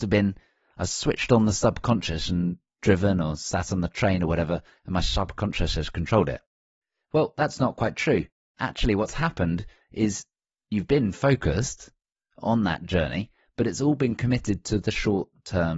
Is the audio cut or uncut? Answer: uncut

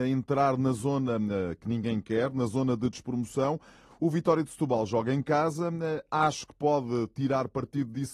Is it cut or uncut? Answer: uncut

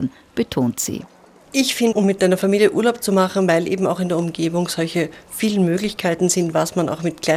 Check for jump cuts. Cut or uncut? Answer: cut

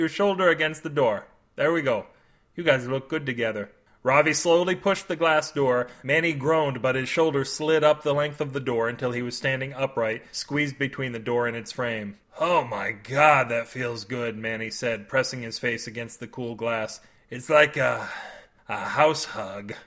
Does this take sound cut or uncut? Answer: uncut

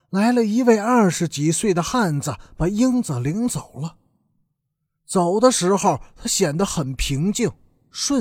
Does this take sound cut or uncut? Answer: uncut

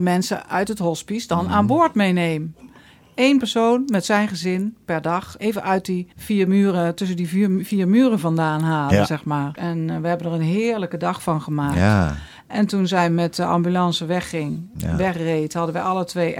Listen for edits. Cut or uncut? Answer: cut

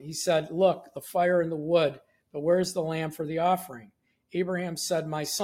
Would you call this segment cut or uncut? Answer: uncut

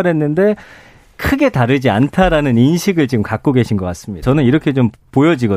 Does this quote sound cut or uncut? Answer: cut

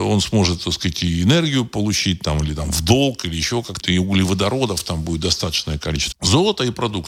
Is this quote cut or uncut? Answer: cut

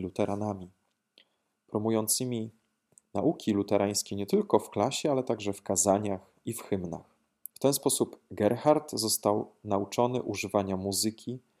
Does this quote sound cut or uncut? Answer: cut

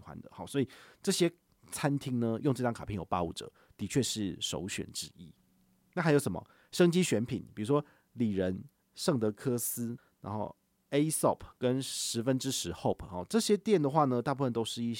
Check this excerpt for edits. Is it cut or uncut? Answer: uncut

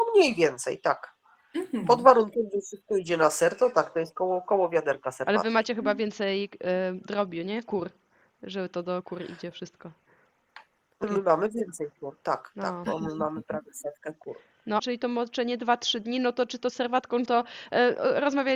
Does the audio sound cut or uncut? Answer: cut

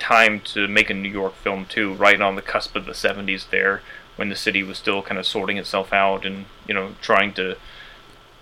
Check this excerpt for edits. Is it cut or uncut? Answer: uncut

